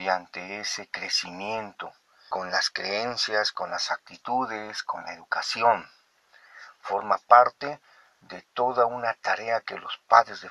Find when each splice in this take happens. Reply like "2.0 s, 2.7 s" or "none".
2.3 s